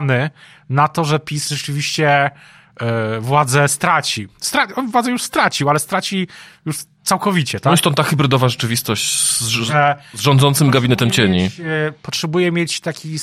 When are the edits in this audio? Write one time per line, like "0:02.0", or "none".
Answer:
none